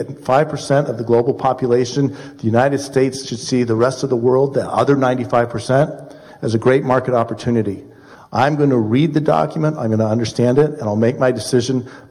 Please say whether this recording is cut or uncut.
cut